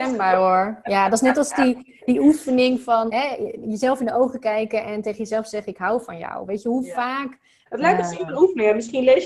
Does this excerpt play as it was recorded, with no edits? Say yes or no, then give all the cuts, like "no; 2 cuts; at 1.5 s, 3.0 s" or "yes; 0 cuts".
no; 2 cuts; at 3.1 s, 7.7 s